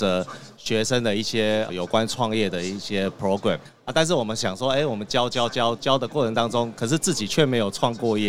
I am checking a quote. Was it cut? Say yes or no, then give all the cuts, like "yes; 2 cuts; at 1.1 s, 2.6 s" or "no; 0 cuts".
no; 0 cuts